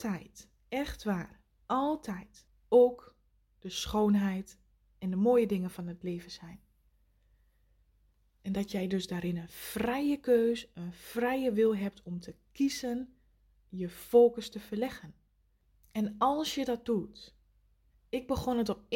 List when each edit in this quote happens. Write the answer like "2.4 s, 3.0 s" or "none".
none